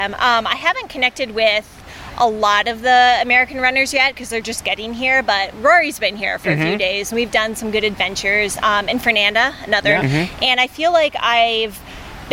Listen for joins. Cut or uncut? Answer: cut